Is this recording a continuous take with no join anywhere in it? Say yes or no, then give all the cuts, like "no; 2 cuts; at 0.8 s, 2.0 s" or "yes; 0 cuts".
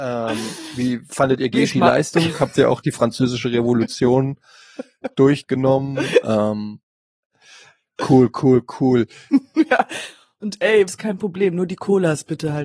no; 2 cuts; at 9.3 s, 10.9 s